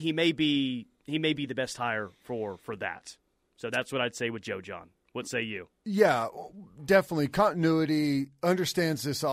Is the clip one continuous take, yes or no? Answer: yes